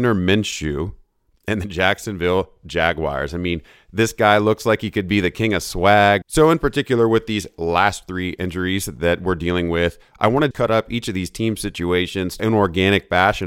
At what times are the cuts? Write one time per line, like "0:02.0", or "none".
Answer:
0:06.2
0:10.5
0:12.4